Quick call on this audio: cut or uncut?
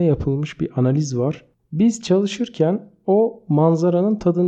cut